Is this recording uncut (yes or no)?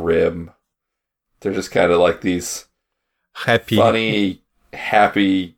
yes